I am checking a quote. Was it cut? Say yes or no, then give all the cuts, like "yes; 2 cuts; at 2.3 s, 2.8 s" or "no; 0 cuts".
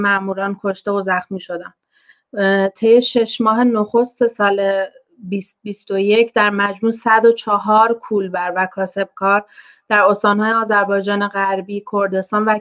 no; 0 cuts